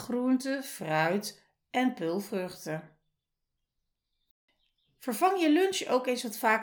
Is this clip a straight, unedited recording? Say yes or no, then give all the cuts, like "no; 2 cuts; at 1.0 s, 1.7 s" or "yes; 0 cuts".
yes; 0 cuts